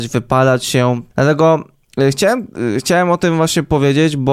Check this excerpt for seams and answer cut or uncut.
cut